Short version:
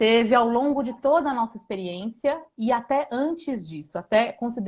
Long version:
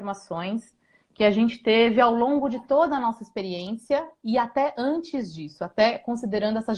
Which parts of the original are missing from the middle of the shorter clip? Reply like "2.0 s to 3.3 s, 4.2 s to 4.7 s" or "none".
none